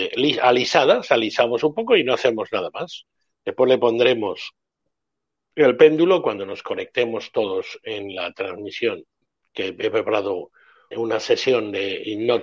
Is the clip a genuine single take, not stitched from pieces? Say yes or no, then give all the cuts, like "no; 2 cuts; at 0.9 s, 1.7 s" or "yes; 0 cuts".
no; 1 cut; at 10.9 s